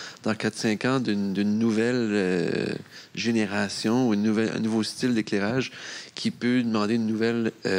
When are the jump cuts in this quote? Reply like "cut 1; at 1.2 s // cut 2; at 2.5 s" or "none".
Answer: none